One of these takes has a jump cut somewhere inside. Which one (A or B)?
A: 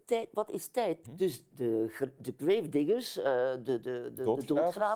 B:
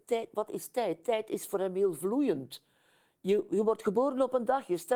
A